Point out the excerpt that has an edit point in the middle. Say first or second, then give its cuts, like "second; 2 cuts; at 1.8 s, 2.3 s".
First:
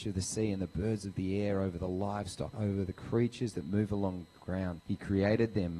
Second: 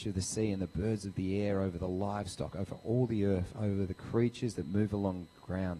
first; 2 cuts; at 2.5 s, 4.8 s